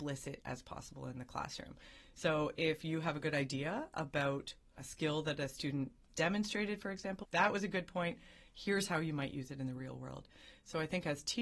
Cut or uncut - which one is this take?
cut